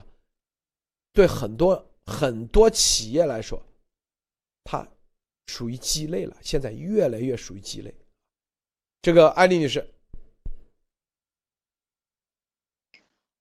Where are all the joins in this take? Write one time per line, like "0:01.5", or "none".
none

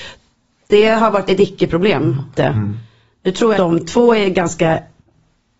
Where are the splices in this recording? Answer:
0:02.4
0:03.5

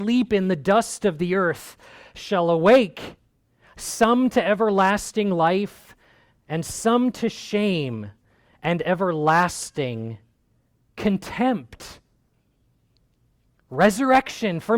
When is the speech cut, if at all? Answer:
none

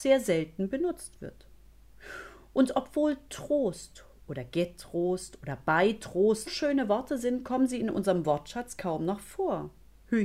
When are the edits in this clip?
0:06.5

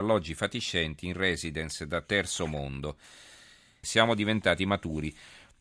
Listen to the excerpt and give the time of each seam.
0:03.8

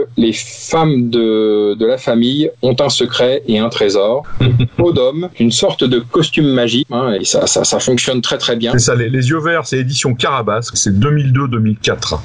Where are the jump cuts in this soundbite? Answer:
0:06.9
0:08.7
0:10.7

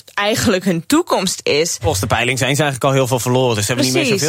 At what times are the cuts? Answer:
none

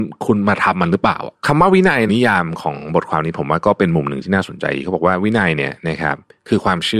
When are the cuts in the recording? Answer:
0:02.1

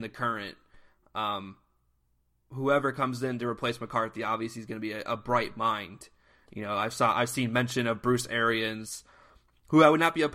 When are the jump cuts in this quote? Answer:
none

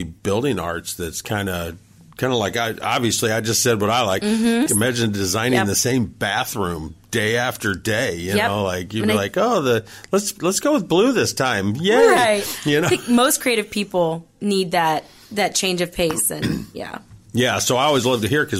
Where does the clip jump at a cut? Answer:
0:04.7

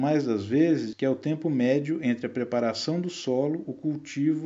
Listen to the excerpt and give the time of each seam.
0:00.9

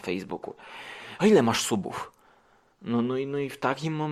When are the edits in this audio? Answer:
0:01.2

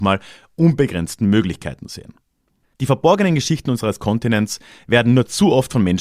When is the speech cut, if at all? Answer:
0:02.6

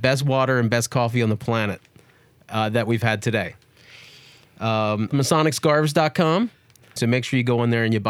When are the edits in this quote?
0:05.1
0:07.0

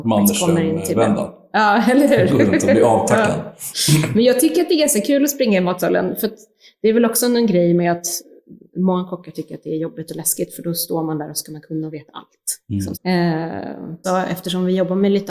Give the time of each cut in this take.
0:12.9
0:14.0

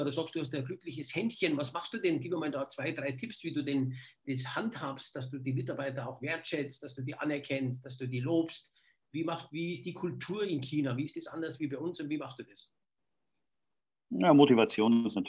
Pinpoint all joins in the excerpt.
none

